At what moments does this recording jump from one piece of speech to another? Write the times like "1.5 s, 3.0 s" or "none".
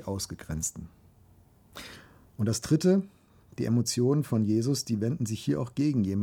none